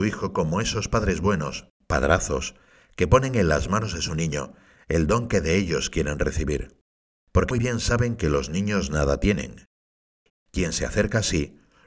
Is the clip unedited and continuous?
no; 2 cuts; at 7.5 s, 10.3 s

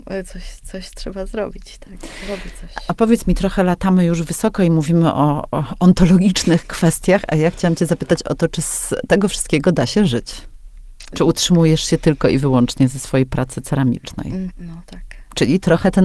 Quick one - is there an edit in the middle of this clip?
yes; 2 cuts; at 11.1 s, 14.5 s

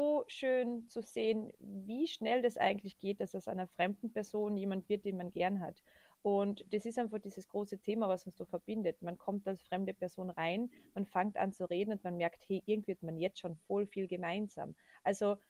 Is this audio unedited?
yes; 0 cuts

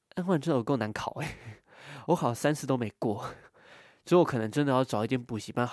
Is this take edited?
no; 0 cuts

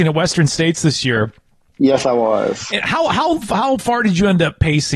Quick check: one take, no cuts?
yes; 0 cuts

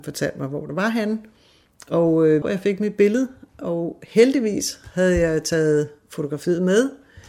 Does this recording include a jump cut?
yes; 1 cut; at 2.4 s

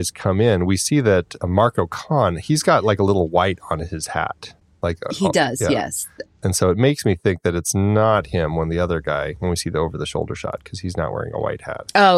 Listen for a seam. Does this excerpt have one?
no; 0 cuts

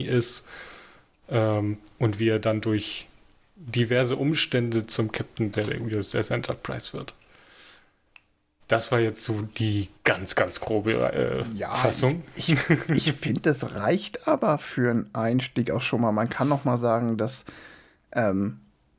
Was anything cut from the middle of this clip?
no; 0 cuts

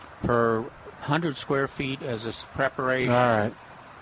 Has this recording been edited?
no; 0 cuts

